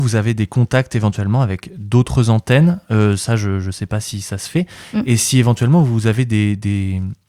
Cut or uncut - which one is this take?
uncut